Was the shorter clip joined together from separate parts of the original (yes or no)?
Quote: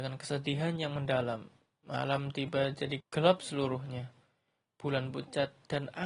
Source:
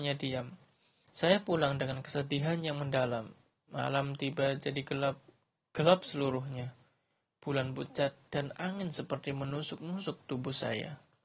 yes